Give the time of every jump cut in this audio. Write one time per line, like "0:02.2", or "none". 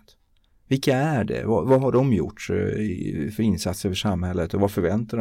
none